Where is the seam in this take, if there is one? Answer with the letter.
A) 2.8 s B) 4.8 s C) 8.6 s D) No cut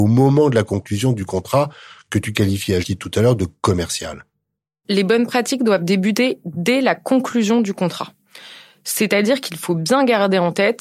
A